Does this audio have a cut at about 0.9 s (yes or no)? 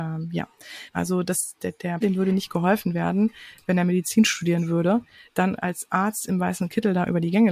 yes